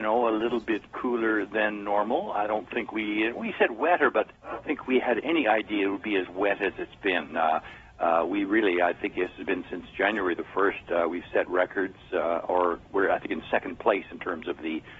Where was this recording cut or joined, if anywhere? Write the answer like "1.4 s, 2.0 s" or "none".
4.4 s